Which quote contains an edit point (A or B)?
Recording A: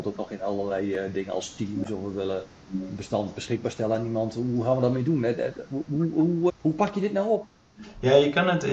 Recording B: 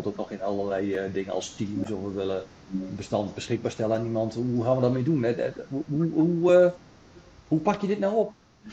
A